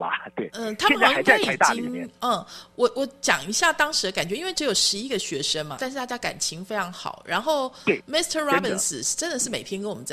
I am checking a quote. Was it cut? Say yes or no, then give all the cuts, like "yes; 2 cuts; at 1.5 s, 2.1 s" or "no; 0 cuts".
yes; 1 cut; at 5.8 s